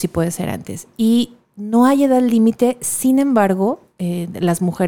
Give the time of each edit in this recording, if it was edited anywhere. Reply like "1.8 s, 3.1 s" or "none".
none